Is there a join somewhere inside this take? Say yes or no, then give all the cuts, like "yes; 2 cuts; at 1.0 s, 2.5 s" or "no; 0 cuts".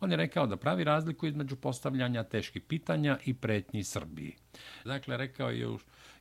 yes; 1 cut; at 4.9 s